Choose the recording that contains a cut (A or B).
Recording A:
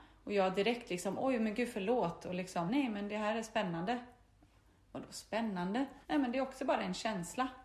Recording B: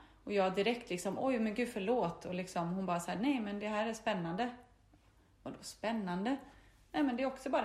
A